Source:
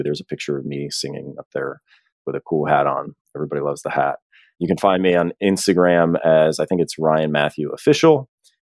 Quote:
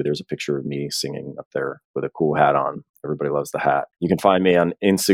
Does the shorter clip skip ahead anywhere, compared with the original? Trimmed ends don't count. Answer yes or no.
yes